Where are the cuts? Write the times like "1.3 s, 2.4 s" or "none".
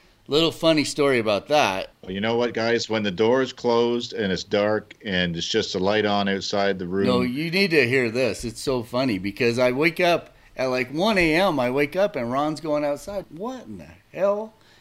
1.9 s, 13.2 s